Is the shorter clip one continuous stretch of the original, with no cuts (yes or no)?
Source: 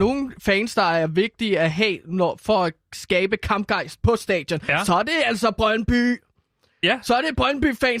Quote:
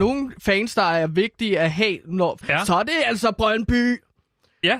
no